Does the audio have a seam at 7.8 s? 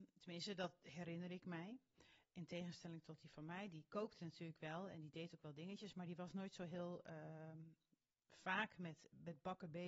no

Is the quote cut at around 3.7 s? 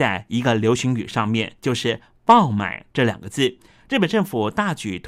yes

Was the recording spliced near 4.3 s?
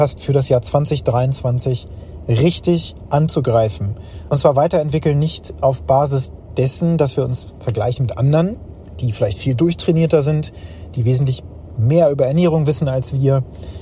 yes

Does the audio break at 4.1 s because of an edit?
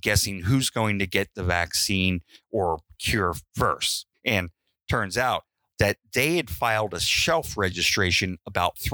yes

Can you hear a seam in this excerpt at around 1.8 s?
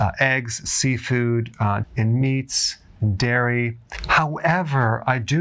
yes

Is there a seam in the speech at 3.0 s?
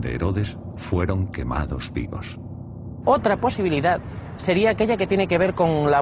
no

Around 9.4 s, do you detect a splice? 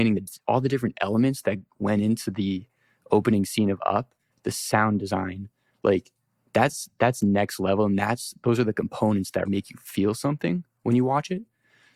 yes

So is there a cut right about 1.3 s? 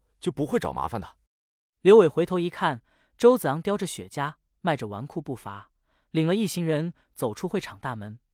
yes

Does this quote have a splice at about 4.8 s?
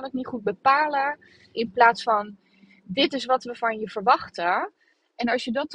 no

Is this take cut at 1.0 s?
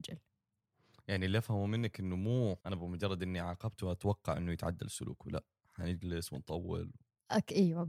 no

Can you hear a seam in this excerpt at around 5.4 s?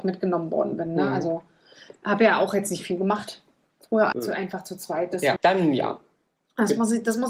yes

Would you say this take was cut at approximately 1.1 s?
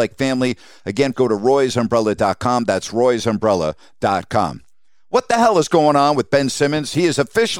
yes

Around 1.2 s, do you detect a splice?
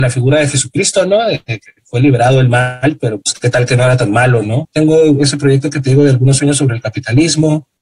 no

